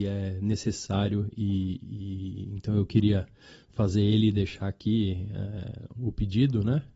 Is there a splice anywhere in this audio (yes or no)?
yes